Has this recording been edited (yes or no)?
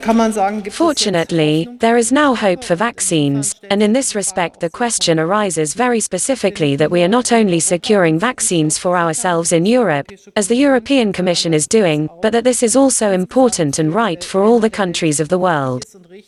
no